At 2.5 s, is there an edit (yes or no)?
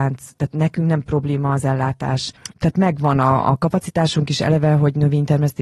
yes